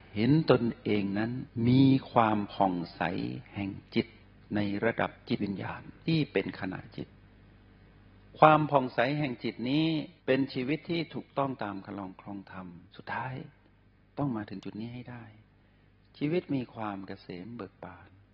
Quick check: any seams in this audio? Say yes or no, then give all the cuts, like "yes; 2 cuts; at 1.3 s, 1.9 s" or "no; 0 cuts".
yes; 2 cuts; at 10.2 s, 12.9 s